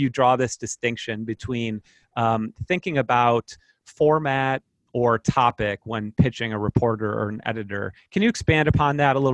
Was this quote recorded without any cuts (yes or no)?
yes